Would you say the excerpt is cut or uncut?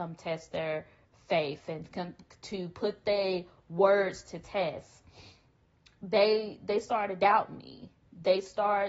uncut